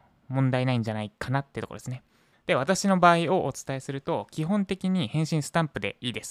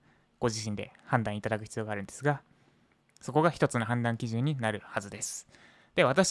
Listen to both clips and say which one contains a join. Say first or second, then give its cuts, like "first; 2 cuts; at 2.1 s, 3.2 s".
first; 1 cut; at 2.3 s